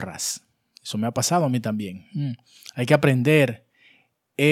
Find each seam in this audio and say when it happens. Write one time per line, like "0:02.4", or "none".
none